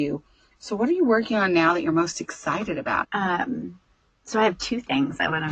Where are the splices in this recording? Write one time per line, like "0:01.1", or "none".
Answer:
0:03.0